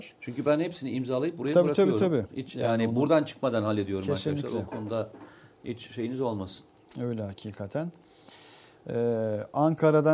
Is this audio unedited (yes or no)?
yes